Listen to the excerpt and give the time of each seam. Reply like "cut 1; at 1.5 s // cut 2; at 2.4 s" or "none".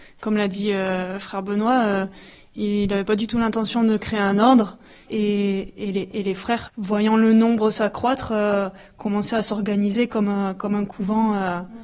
cut 1; at 5.1 s // cut 2; at 6.7 s